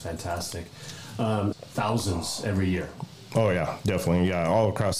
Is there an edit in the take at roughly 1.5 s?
yes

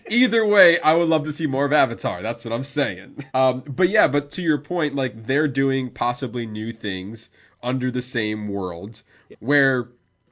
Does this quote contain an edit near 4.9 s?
no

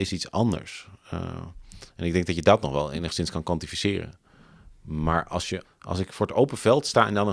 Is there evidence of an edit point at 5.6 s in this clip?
yes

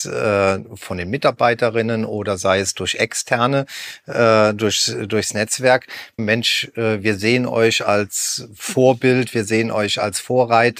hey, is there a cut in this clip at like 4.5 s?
no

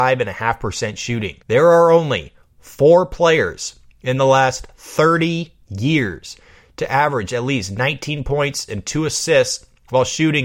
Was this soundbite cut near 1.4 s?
yes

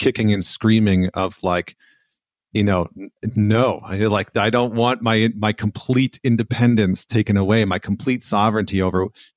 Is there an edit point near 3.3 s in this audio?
no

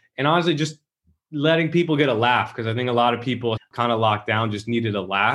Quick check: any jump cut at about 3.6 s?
yes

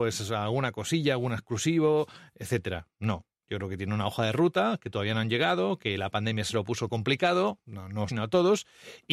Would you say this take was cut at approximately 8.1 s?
yes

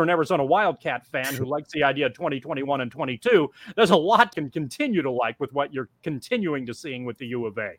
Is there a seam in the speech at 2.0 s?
no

